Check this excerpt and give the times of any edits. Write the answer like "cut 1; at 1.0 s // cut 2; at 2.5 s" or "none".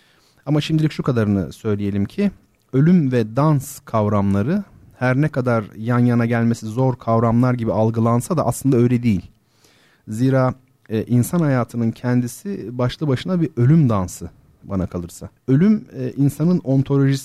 cut 1; at 15.4 s